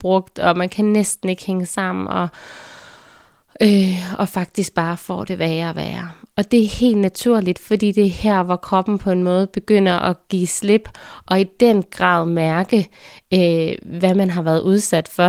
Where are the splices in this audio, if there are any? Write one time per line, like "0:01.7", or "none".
none